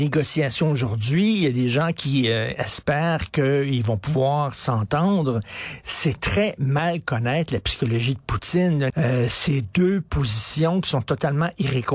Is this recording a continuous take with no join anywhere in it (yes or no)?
no